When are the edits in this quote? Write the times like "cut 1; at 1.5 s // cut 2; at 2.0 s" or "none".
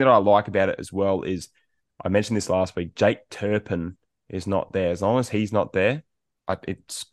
none